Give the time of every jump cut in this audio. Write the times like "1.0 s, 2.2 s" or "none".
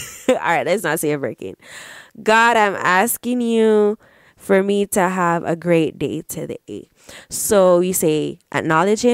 none